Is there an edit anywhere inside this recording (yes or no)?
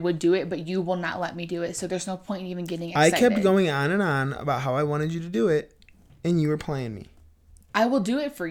no